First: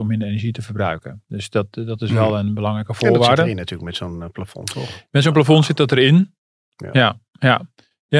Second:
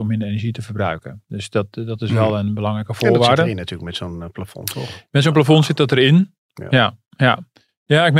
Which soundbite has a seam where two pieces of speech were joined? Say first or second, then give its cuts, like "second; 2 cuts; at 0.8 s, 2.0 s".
second; 1 cut; at 6.4 s